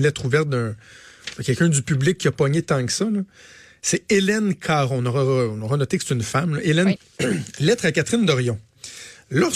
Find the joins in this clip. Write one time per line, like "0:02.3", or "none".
0:07.0